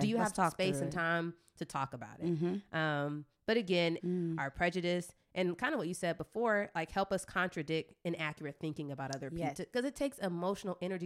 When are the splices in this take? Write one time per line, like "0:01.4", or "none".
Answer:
0:04.0
0:09.5